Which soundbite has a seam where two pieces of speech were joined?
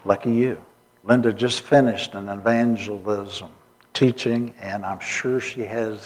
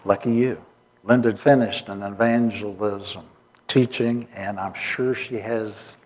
second; 1 cut; at 1.4 s

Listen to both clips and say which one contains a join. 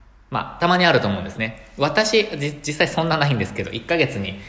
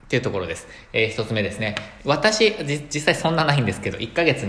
second; 1 cut; at 2.0 s

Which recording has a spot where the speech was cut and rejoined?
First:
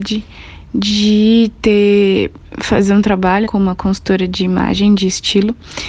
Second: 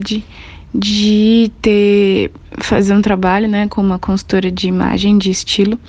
first; 1 cut; at 3.5 s

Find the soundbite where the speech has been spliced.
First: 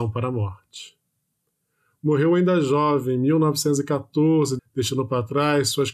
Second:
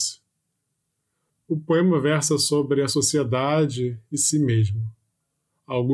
first; 1 cut; at 4.6 s

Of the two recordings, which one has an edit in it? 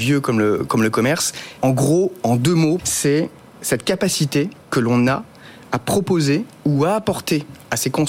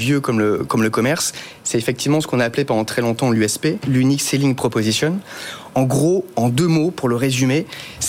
first; 3 cuts; at 1.6 s, 2.8 s, 4.6 s

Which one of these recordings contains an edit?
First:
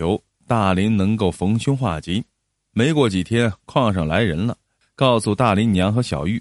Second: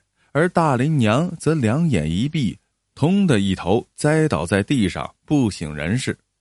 first; 1 cut; at 4.8 s

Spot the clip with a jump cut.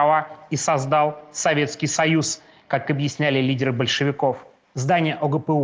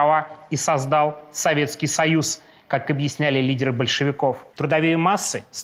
second; 1 cut; at 4.5 s

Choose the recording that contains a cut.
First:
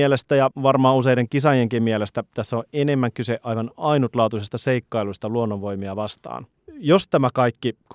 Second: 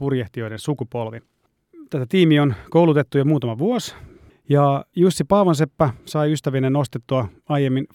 second; 1 cut; at 4.3 s

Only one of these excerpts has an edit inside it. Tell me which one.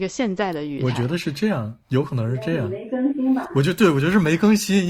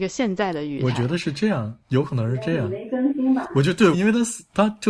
second; 1 cut; at 3.9 s

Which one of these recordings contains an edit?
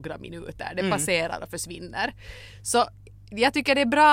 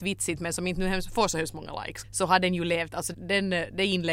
second; 2 cuts; at 2.0 s, 3.1 s

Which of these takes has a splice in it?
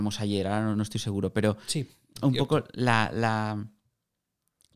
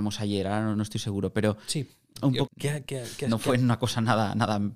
second; 1 cut; at 2.5 s

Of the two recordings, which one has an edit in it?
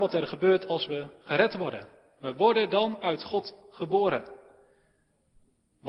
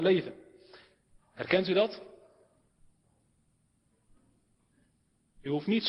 second; 1 cut; at 1.2 s

